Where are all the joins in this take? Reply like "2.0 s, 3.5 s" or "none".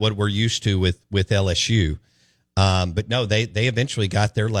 none